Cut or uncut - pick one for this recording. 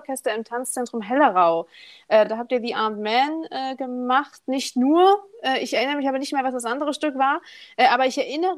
uncut